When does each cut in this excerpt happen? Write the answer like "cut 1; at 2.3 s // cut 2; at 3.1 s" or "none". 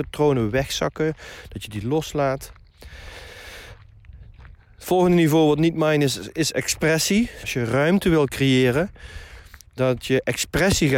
cut 1; at 7.4 s